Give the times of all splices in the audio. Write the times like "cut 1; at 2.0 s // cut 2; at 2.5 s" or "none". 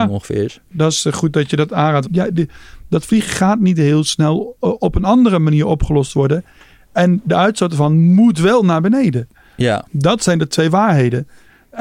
cut 1; at 2.0 s